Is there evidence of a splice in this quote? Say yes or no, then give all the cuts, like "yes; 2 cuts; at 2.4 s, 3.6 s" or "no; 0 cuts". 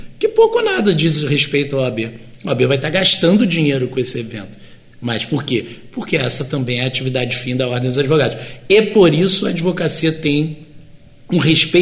no; 0 cuts